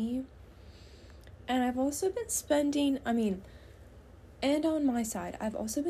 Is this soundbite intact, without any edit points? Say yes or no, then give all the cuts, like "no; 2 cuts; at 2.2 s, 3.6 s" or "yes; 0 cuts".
yes; 0 cuts